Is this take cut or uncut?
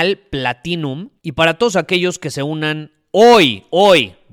cut